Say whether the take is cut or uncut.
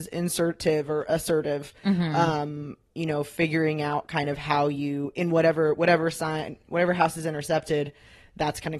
uncut